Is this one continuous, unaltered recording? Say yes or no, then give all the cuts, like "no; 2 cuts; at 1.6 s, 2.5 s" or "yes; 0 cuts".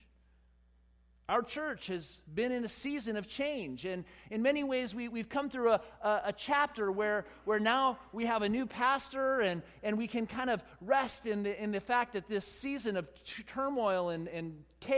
yes; 0 cuts